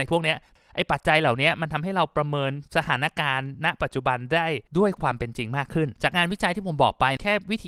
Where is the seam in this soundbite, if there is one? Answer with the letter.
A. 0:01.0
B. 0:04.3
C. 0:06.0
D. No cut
C